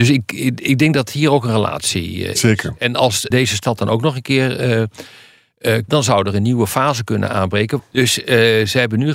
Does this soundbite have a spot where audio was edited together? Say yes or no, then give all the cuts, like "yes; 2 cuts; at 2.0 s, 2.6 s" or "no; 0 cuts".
yes; 3 cuts; at 3.3 s, 5.9 s, 7.8 s